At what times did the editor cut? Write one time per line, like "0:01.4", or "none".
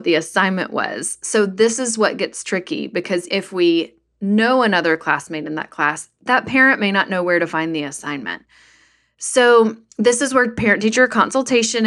0:03.3